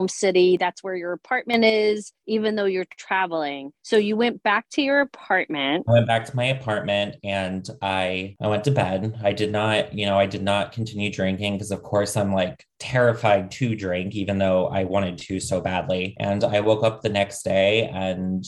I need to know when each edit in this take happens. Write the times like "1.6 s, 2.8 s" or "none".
none